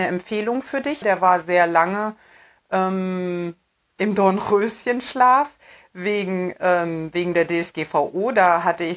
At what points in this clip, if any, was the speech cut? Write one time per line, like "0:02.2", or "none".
0:01.0